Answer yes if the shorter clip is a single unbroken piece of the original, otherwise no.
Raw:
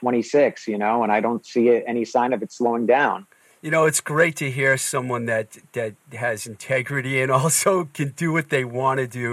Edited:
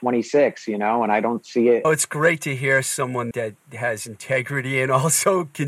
no